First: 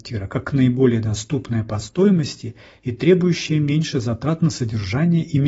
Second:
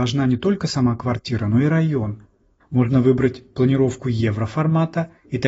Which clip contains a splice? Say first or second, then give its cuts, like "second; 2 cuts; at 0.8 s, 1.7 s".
second; 1 cut; at 2.6 s